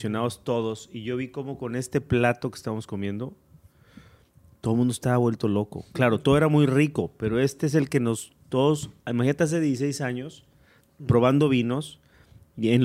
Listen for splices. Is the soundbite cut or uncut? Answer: uncut